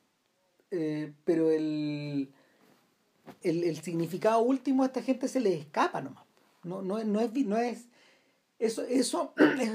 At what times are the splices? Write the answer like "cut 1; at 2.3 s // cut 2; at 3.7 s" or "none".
cut 1; at 3.4 s